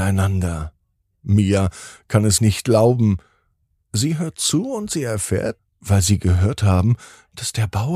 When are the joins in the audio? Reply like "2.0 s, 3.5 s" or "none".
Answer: 2.4 s, 5.6 s